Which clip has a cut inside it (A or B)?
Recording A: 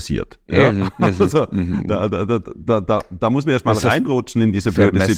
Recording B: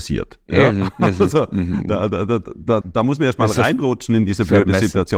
B